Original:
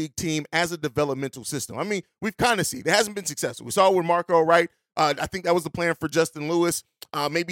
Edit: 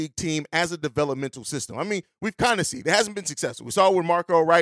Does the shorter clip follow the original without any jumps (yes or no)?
yes